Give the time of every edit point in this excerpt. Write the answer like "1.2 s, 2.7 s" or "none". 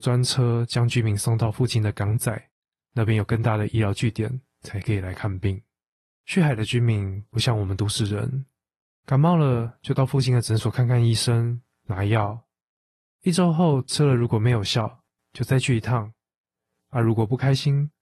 6.2 s